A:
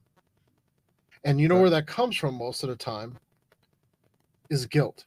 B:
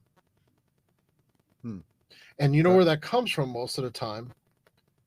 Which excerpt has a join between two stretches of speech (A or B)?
A